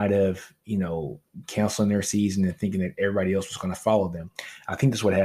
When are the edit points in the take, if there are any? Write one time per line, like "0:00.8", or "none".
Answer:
0:01.4